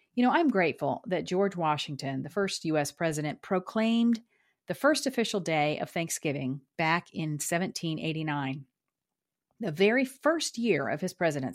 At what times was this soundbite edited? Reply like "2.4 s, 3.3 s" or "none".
none